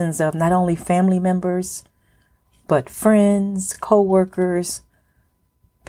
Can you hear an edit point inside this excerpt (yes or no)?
no